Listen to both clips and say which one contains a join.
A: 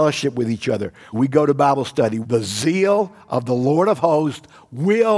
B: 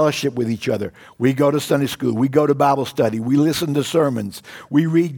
A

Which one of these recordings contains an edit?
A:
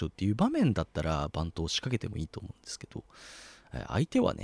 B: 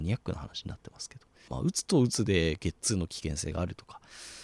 B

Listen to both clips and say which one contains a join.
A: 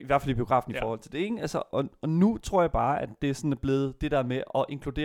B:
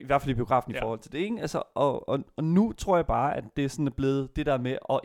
A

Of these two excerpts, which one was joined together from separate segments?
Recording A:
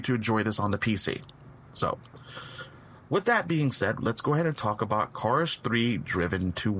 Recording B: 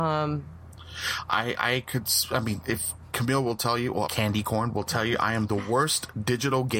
B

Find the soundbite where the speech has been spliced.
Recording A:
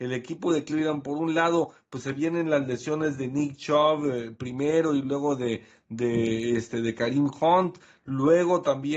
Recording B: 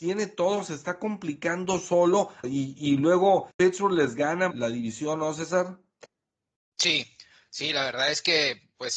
B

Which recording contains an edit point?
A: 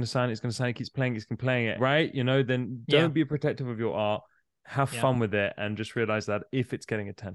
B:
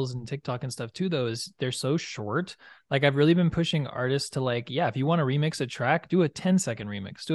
A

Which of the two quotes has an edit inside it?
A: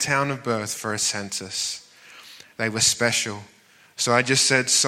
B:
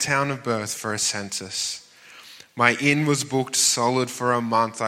A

